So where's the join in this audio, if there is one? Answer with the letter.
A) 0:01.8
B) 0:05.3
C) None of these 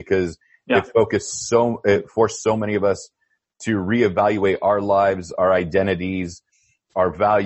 C